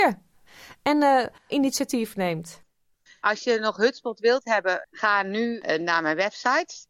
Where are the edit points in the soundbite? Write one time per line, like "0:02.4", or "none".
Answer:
0:01.5
0:03.1
0:04.8